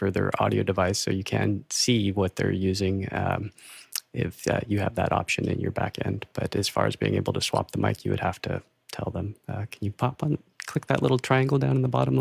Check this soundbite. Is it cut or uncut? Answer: uncut